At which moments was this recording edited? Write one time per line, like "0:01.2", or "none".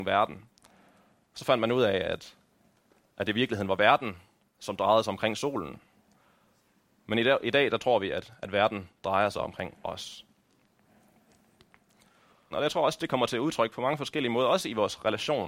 0:12.5